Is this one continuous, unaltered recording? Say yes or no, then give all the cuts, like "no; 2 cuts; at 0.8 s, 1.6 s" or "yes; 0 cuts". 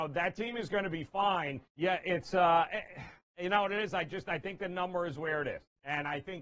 no; 1 cut; at 1.7 s